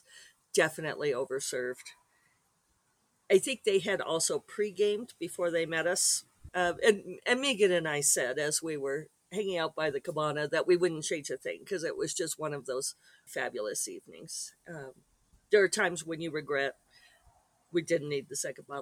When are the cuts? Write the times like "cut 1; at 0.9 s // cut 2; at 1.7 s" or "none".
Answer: cut 1; at 6.5 s // cut 2; at 13.3 s